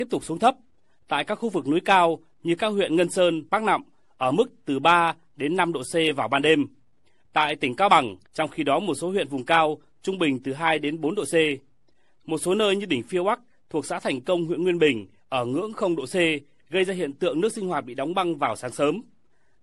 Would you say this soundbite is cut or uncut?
cut